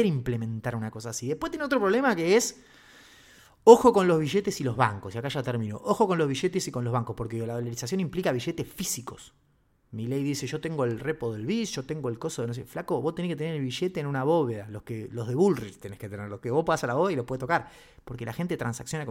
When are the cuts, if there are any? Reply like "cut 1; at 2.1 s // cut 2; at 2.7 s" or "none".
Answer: none